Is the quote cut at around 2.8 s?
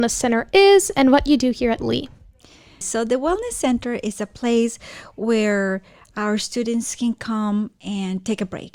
yes; 1 cut; at 2.8 s

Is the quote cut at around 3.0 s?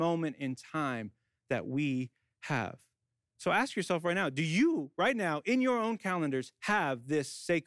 no; 0 cuts

